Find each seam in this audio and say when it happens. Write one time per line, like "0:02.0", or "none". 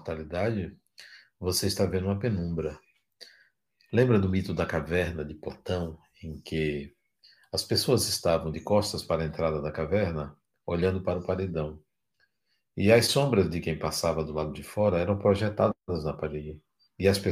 none